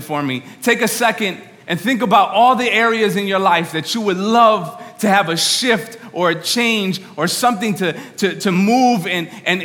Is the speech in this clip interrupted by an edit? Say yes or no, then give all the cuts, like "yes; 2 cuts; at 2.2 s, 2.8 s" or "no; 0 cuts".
no; 0 cuts